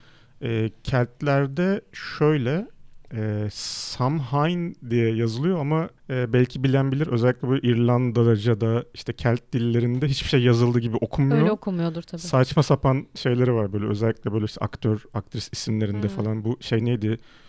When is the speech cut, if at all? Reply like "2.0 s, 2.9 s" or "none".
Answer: 6.0 s